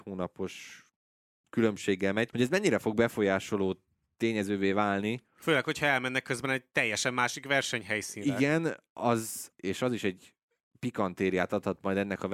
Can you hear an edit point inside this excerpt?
yes; 2 cuts; at 2.3 s, 9.5 s

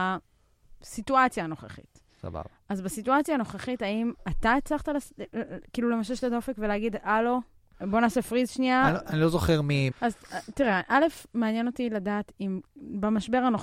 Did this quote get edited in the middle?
yes; 2 cuts; at 7.7 s, 9.9 s

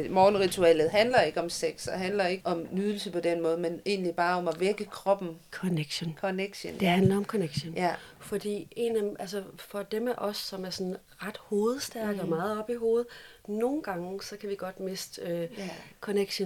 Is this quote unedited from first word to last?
no; 1 cut; at 2.4 s

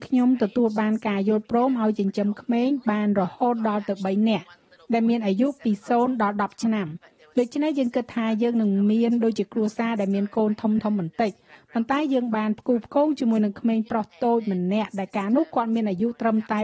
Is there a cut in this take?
no; 0 cuts

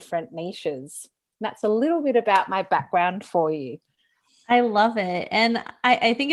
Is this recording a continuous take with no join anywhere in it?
yes; 0 cuts

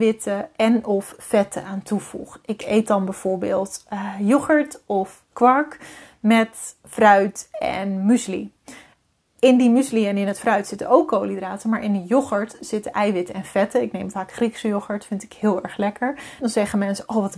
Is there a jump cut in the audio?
yes; 2 cuts; at 5.3 s, 16.4 s

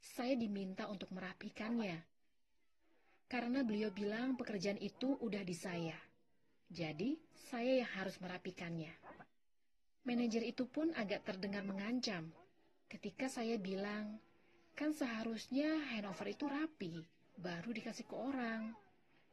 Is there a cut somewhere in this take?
no; 0 cuts

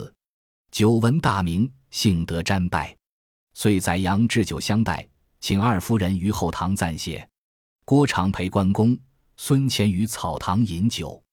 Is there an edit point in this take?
no; 0 cuts

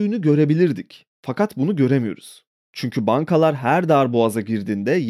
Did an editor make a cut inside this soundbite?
no; 0 cuts

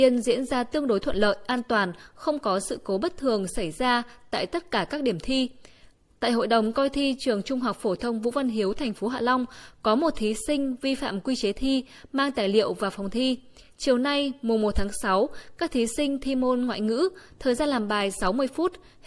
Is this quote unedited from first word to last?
yes; 0 cuts

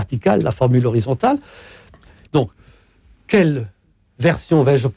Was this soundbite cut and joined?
yes; 1 cut; at 2.3 s

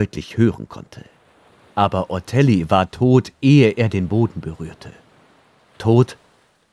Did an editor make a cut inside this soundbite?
no; 0 cuts

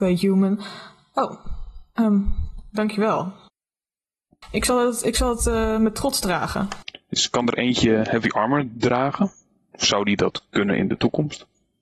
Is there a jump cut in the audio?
yes; 1 cut; at 6.9 s

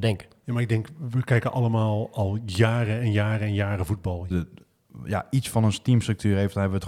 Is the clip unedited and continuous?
no; 1 cut; at 4.3 s

